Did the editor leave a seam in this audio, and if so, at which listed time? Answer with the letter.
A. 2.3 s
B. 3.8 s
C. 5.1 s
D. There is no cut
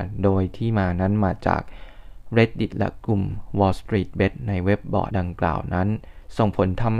C